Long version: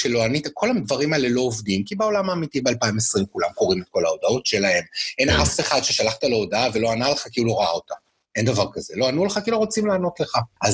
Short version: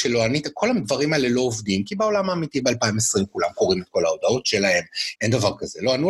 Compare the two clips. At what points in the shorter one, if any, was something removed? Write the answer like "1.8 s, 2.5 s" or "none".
5.2 s